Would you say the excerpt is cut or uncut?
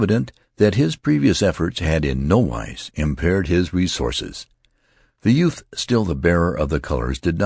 uncut